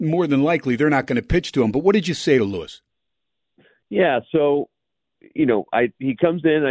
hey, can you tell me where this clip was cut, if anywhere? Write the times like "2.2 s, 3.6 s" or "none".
none